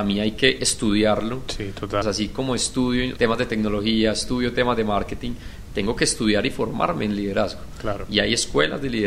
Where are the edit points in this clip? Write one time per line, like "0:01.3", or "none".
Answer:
0:02.0
0:03.2